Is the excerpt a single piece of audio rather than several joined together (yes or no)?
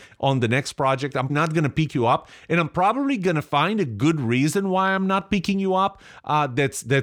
no